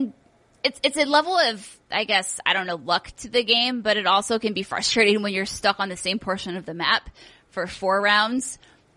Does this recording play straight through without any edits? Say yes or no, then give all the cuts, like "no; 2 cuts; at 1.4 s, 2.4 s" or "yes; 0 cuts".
yes; 0 cuts